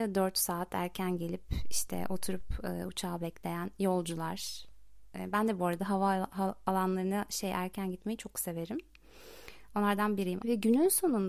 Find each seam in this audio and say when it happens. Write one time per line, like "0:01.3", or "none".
0:10.4